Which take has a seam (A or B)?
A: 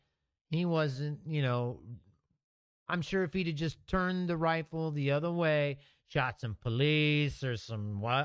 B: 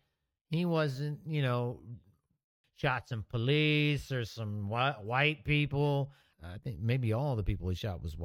B